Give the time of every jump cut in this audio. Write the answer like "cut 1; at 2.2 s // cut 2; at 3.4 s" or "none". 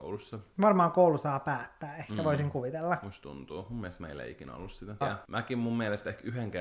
cut 1; at 5.0 s

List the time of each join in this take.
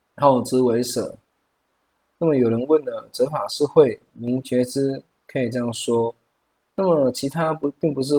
none

